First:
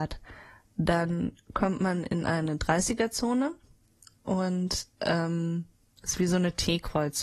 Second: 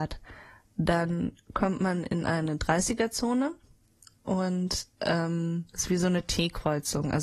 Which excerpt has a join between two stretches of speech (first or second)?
second